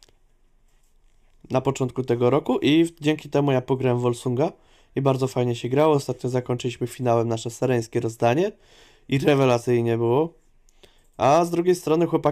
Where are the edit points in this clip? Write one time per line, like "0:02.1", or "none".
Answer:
none